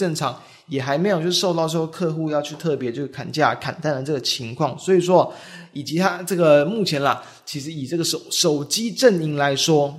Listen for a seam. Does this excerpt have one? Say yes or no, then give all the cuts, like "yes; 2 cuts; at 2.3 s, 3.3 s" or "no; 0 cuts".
no; 0 cuts